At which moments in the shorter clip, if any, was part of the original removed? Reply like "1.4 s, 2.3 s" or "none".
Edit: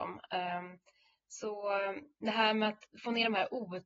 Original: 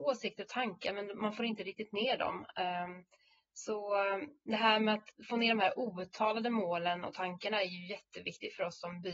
none